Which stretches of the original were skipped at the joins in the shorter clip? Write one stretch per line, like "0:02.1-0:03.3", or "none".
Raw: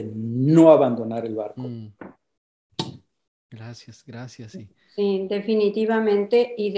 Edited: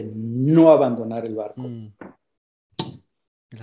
none